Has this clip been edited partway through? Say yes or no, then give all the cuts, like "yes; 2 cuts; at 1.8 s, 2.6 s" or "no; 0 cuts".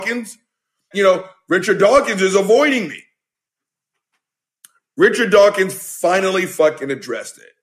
yes; 1 cut; at 0.9 s